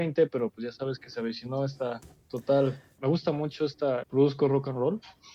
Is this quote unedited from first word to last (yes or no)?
no